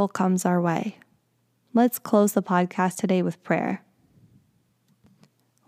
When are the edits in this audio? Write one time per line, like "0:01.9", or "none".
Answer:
0:01.6